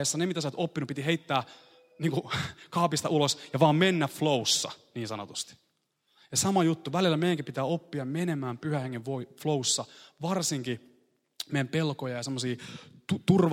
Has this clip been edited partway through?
no; 0 cuts

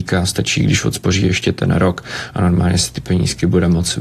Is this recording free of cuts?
yes; 0 cuts

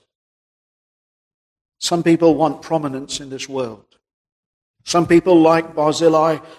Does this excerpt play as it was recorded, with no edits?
yes; 0 cuts

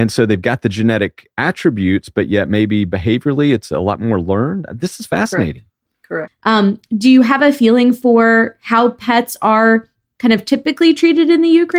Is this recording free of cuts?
no; 1 cut; at 6.3 s

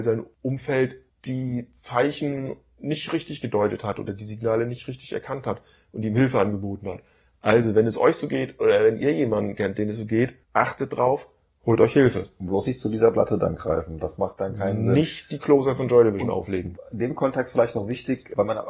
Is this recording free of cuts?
yes; 0 cuts

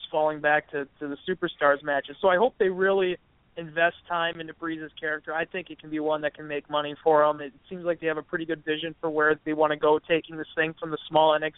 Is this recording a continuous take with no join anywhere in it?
no; 2 cuts; at 7.4 s, 9.4 s

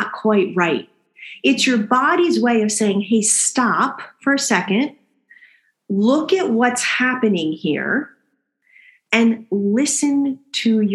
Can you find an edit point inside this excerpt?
no; 0 cuts

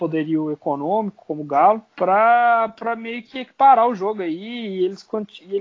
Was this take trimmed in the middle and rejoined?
yes; 1 cut; at 1.9 s

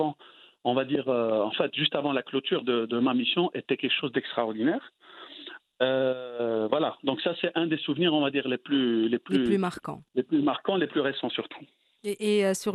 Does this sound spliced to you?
no; 0 cuts

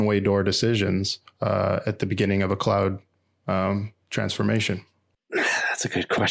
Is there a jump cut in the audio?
no; 0 cuts

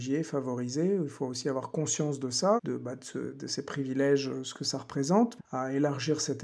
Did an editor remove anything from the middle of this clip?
yes; 2 cuts; at 2.6 s, 5.4 s

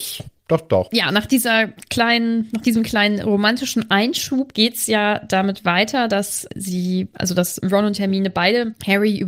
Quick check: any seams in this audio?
no; 0 cuts

